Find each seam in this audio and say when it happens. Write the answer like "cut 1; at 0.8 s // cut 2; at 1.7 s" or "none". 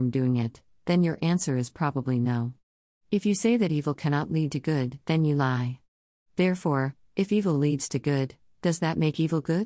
none

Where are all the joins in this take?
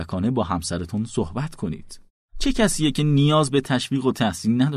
cut 1; at 2.2 s

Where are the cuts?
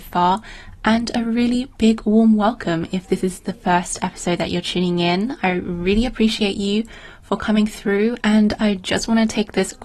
cut 1; at 8.2 s

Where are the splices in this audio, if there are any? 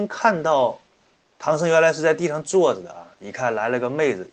cut 1; at 1.2 s

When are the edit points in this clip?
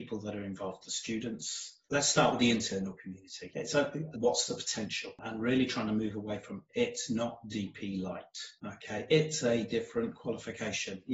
cut 1; at 4.1 s

